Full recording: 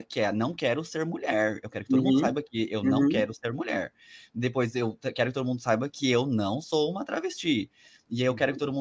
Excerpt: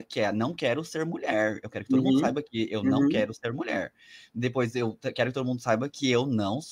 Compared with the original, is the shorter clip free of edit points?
yes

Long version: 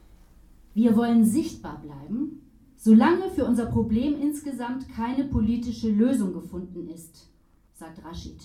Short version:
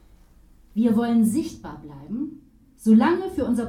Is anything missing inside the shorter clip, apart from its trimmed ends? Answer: no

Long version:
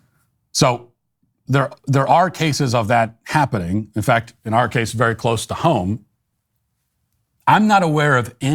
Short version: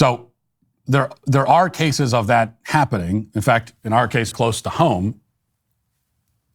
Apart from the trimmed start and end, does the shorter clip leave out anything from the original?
yes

